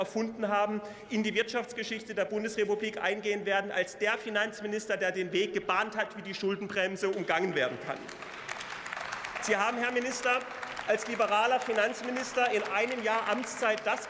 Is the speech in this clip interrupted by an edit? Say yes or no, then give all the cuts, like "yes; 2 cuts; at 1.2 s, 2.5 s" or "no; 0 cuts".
no; 0 cuts